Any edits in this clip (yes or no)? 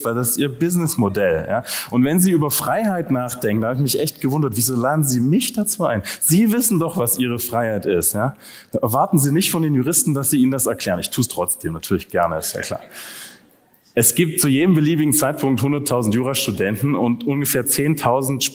no